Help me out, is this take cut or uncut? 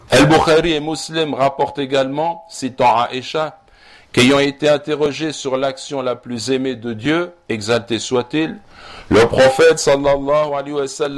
uncut